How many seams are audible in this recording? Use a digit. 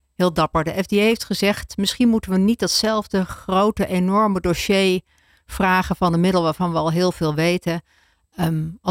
0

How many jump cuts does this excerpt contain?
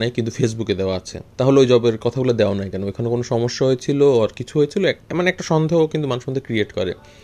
1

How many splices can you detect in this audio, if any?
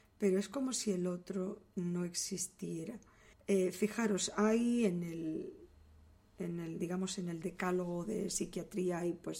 1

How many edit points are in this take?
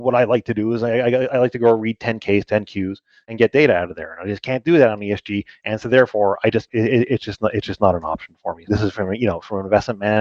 2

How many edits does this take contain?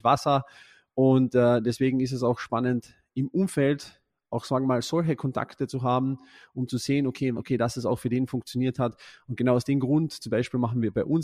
1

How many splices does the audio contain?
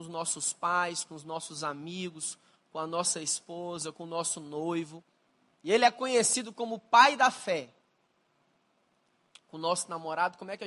2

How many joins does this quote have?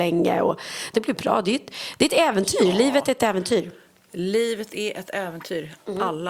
1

